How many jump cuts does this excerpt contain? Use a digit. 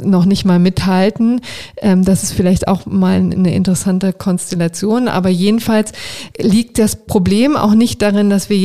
1